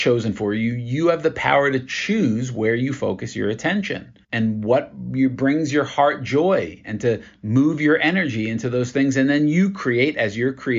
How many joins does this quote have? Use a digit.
1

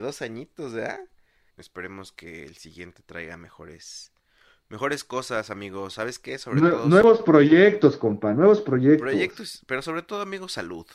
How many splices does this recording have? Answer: 1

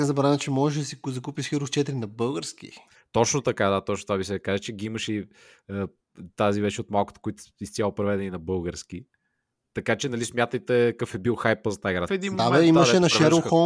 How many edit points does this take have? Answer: 1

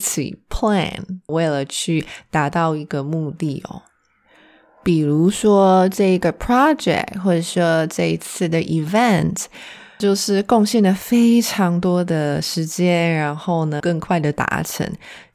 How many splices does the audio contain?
3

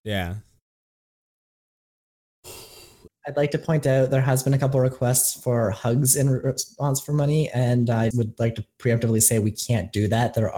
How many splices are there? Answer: 2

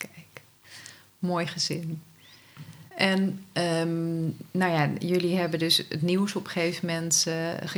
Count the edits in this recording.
1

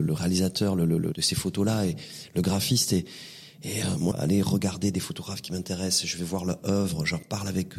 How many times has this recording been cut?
1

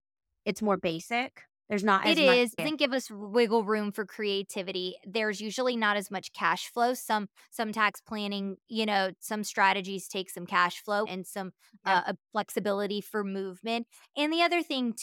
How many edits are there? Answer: 2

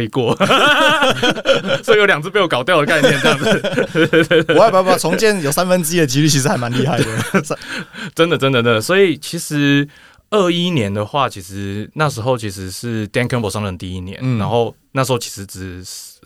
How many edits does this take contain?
0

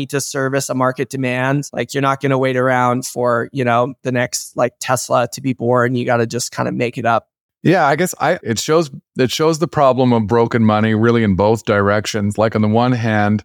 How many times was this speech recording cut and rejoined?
1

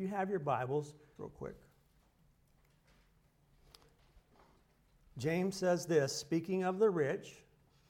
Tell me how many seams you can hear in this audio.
1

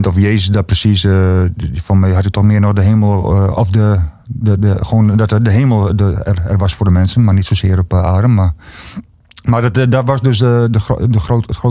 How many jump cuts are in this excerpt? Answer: 0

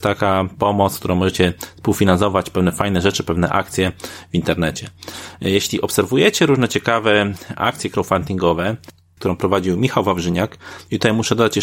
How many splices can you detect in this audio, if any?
1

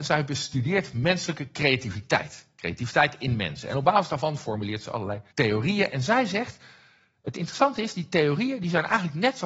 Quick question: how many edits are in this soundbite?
1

